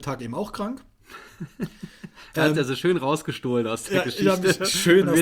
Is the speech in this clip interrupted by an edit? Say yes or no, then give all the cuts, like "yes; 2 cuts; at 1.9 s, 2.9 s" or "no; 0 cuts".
no; 0 cuts